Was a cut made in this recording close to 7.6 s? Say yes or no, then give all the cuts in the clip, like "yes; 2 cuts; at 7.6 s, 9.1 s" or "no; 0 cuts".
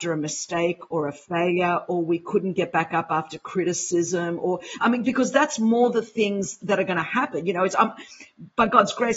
no; 0 cuts